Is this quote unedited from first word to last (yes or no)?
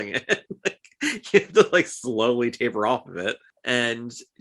yes